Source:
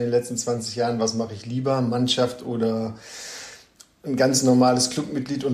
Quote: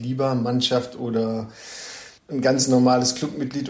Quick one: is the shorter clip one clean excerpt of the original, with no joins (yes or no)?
no